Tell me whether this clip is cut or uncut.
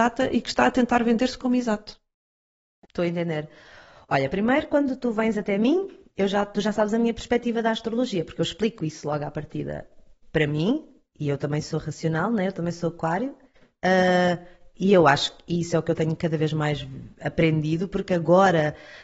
uncut